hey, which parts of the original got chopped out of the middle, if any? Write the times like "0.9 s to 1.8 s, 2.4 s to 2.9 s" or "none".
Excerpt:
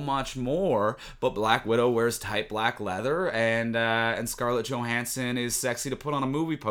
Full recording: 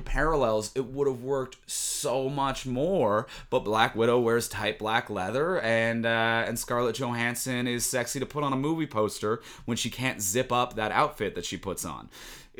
none